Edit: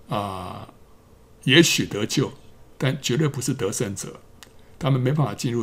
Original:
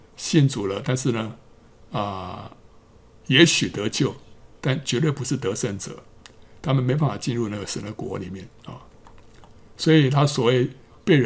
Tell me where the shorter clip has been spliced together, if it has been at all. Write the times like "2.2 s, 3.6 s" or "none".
none